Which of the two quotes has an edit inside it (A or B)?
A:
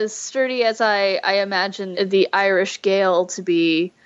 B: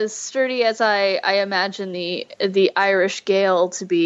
A